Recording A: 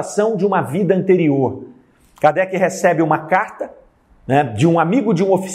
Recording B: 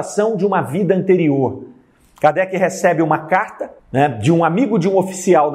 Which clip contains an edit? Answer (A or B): B